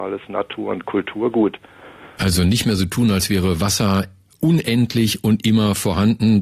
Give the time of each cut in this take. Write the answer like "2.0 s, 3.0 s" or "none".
2.2 s

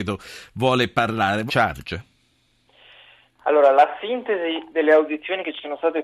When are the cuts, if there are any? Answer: 1.5 s

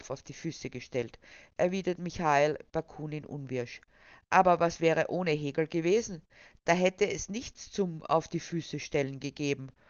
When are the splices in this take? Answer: none

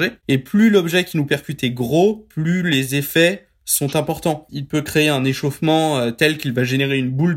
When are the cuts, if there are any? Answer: 4.5 s

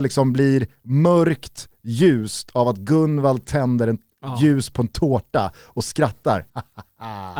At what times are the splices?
6.5 s

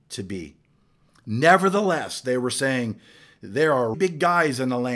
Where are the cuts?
3.9 s

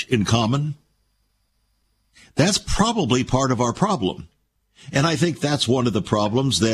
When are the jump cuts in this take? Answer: none

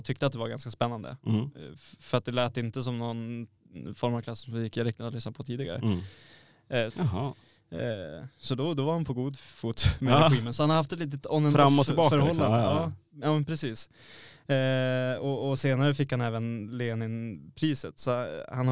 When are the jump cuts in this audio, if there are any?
6.9 s

